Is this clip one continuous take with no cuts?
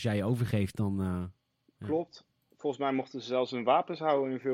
yes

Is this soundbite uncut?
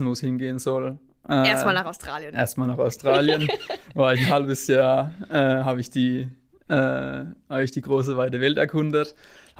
yes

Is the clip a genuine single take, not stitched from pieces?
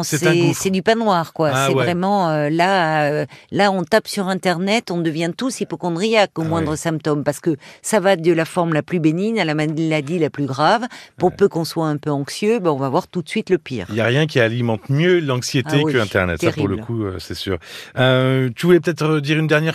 yes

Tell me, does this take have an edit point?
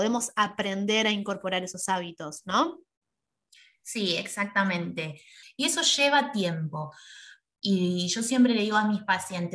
yes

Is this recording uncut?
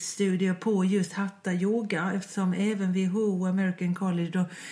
yes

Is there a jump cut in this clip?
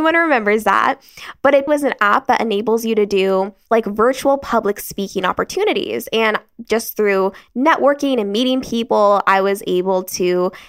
yes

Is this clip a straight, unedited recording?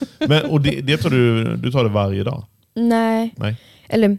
yes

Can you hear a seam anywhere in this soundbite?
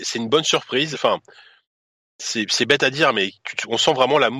yes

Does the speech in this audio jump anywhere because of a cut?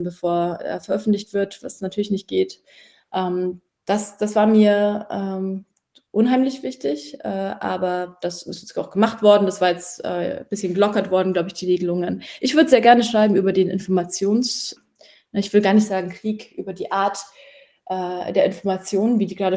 no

